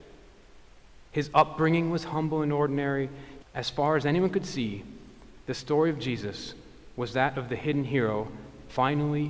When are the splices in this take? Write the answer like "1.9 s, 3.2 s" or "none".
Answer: 1.1 s, 3.4 s